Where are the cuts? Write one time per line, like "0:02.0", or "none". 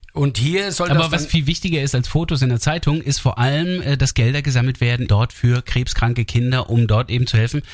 0:05.1